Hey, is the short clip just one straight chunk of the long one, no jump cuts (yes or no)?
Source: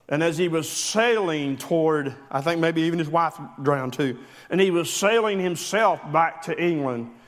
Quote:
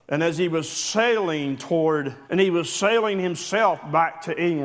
no